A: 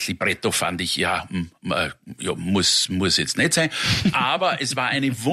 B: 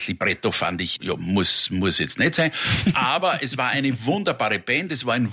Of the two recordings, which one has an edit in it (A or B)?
B